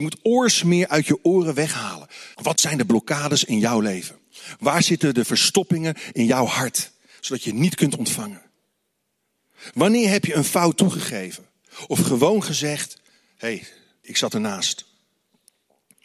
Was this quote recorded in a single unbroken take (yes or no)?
no